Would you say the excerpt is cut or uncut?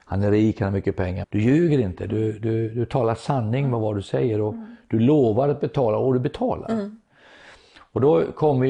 cut